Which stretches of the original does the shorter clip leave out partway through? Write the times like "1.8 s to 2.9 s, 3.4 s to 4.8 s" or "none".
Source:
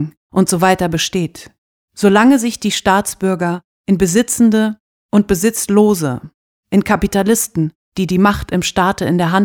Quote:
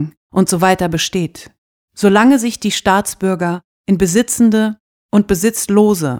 none